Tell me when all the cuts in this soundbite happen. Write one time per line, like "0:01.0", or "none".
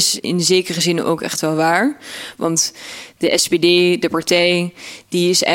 0:02.4